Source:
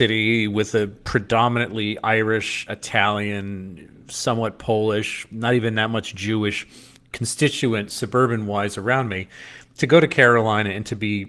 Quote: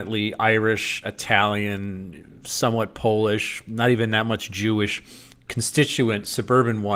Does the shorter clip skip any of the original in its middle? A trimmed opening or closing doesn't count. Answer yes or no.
no